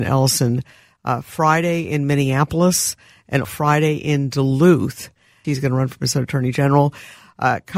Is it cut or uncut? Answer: cut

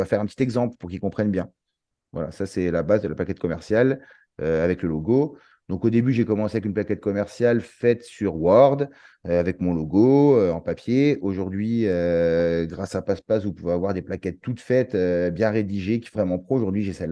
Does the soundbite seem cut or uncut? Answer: cut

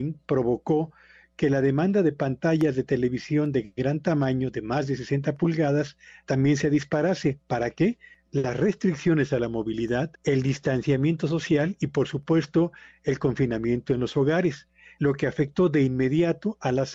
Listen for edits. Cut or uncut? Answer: cut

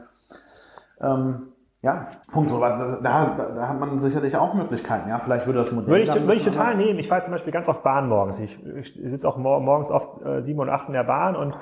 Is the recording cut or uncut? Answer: cut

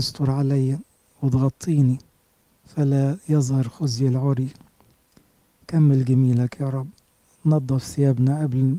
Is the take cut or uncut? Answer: uncut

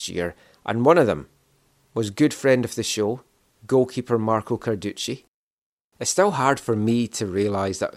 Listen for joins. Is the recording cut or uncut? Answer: uncut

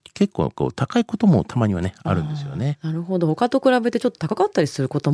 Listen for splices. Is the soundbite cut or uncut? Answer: uncut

